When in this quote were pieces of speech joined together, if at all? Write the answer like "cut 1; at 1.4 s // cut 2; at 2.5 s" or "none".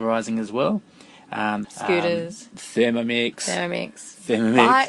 cut 1; at 1.6 s

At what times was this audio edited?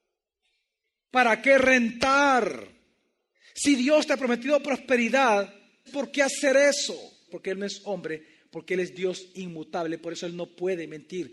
cut 1; at 5.9 s // cut 2; at 7.3 s

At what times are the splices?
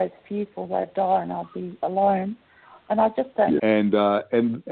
cut 1; at 3.6 s

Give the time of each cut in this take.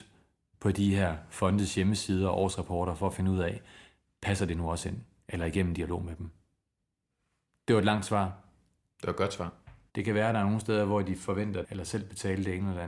cut 1; at 9.9 s // cut 2; at 11.6 s

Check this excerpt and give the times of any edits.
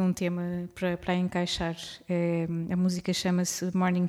none

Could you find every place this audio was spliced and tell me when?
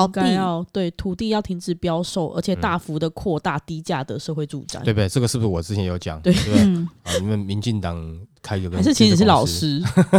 none

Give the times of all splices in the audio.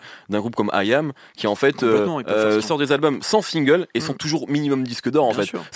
cut 1; at 2.6 s

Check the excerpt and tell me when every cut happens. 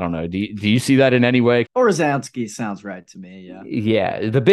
cut 1; at 1.6 s

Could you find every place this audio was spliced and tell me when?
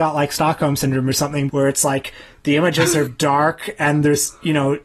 cut 1; at 1.5 s // cut 2; at 3.1 s

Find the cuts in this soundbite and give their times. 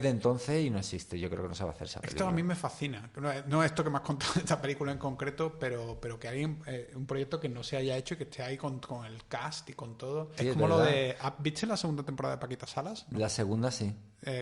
cut 1; at 10.4 s // cut 2; at 13.1 s

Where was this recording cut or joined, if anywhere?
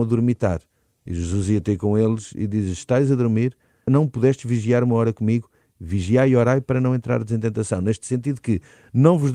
cut 1; at 3.9 s

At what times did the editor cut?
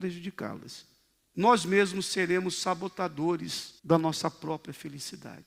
cut 1; at 1.2 s // cut 2; at 3.8 s

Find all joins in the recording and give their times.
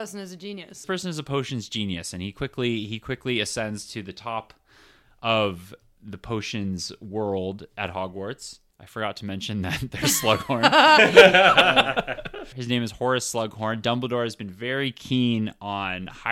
cut 1; at 12.5 s

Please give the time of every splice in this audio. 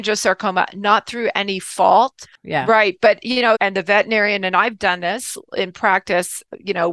cut 1; at 2.4 s // cut 2; at 3.5 s

